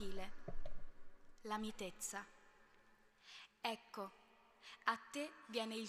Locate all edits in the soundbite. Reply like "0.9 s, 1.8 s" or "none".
3.6 s